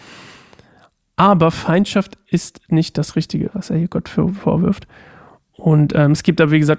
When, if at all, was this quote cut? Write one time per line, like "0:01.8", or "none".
0:03.5